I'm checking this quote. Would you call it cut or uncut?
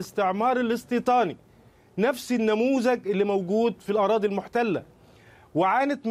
uncut